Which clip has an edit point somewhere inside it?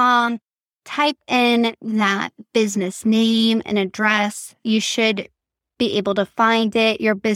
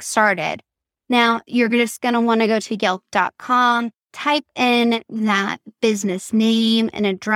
second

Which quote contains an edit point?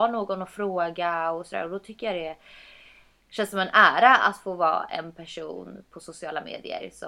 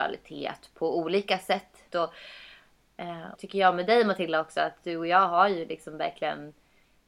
second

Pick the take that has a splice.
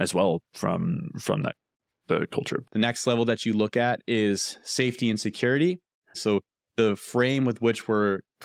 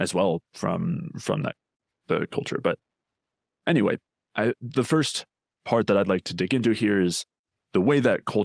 first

